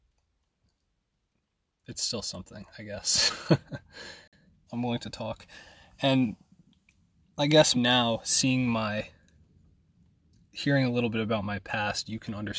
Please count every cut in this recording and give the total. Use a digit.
2